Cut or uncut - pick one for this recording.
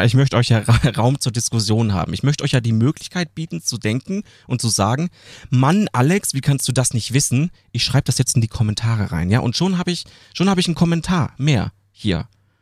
uncut